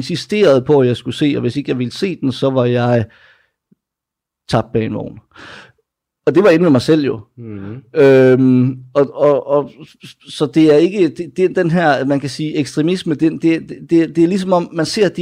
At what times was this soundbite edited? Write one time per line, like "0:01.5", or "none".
none